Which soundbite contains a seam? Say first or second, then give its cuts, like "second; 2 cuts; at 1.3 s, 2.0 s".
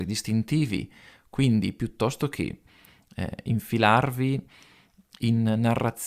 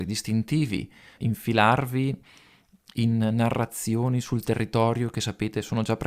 second; 1 cut; at 1.2 s